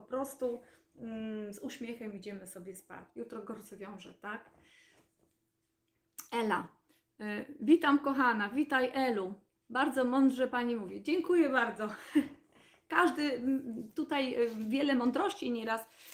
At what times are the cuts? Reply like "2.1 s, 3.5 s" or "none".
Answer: 3.1 s